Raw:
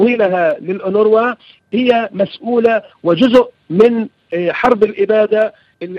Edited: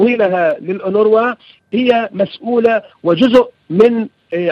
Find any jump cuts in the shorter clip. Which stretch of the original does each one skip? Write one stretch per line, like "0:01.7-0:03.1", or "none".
none